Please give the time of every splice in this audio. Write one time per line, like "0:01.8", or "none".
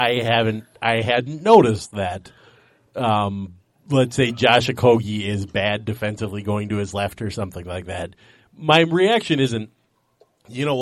none

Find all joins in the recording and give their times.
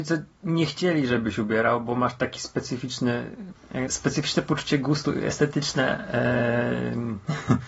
0:03.9

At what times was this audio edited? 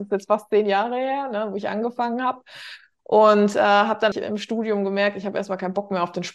0:04.1

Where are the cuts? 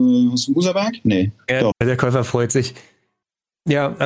0:01.7

